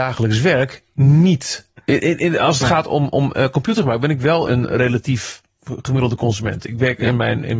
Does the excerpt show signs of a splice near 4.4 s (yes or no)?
yes